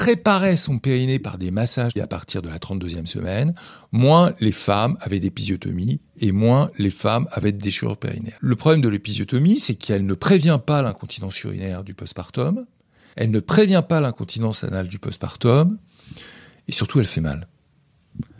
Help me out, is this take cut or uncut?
cut